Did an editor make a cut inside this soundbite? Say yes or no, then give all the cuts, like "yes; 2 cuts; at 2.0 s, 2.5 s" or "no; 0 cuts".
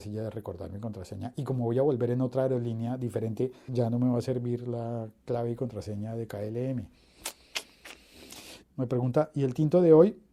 yes; 2 cuts; at 3.7 s, 8.6 s